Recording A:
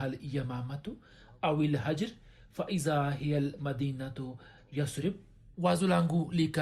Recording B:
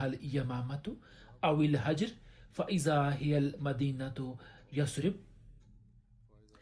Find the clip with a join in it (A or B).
A